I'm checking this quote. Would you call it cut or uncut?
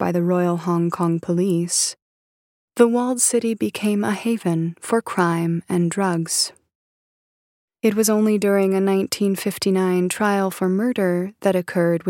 uncut